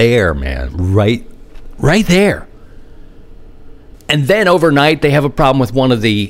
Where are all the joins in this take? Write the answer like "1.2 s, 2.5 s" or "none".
3.9 s